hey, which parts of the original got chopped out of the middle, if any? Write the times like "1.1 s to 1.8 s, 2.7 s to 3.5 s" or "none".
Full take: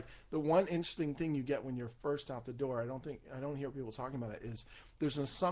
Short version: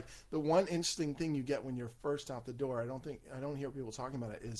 none